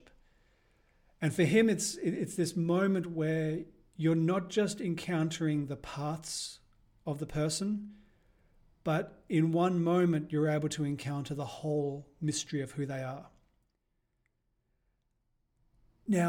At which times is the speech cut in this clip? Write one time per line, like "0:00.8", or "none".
none

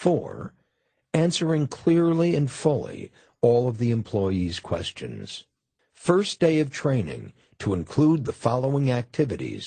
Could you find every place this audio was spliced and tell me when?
0:05.8

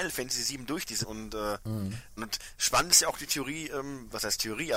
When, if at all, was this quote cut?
0:01.0
0:02.2

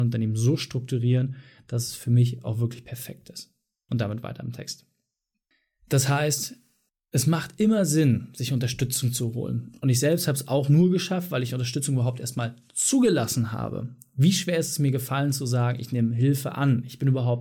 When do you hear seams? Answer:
none

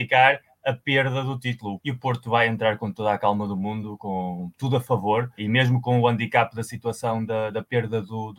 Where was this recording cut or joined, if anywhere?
0:01.8
0:05.4

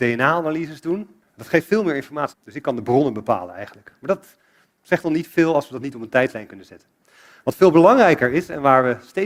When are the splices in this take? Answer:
0:01.2
0:02.3

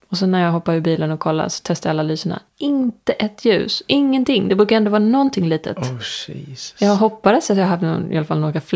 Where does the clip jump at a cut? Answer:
none

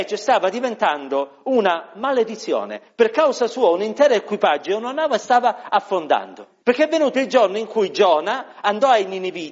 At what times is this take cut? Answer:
0:06.6

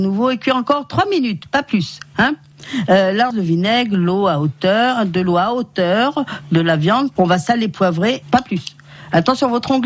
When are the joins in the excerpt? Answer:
0:03.3
0:07.2
0:08.2

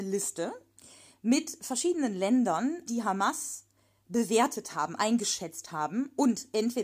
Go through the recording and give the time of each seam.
0:02.9

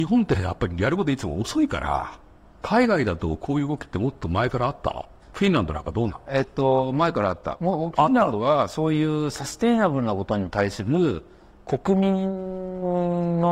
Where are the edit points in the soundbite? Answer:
0:02.5
0:05.2

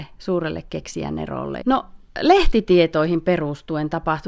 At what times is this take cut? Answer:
0:01.6

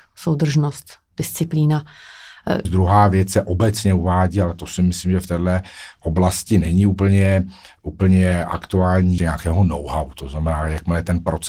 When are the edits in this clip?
0:02.7
0:09.2

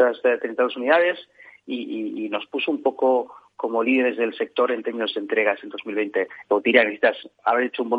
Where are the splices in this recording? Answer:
0:06.4

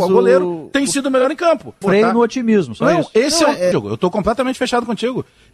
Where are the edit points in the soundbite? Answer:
0:01.8
0:03.7

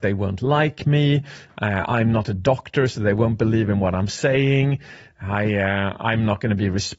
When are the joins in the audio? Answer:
none

